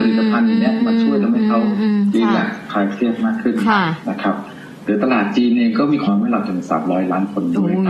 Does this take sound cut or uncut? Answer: cut